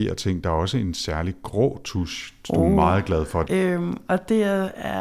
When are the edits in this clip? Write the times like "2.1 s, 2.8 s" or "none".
3.4 s